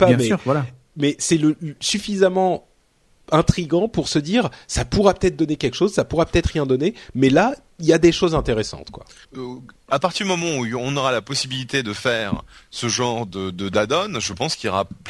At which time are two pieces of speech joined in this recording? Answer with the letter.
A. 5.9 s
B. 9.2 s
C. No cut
B